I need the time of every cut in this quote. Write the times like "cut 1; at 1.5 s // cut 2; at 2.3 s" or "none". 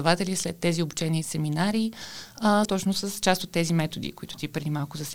cut 1; at 2.7 s